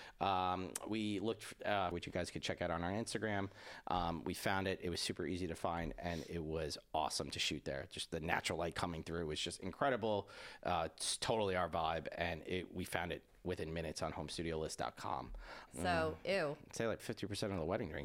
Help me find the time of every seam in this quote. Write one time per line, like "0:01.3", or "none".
0:01.9
0:15.7
0:17.0